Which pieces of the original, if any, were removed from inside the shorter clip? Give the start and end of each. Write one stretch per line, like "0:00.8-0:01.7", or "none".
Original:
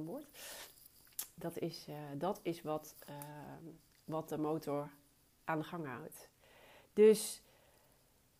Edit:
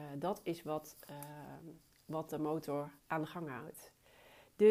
0:05.0-0:05.3